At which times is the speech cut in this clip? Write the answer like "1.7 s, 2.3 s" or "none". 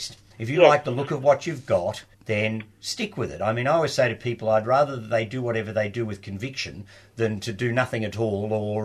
2.1 s